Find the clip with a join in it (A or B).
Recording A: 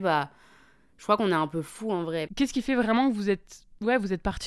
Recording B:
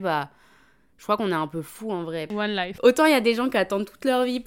A